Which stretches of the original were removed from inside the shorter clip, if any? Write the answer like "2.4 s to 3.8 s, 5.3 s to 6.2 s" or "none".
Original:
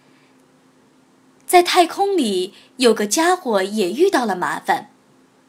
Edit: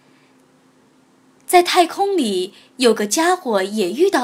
none